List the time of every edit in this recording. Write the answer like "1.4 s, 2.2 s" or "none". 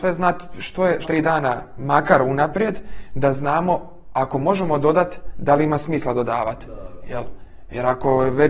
1.0 s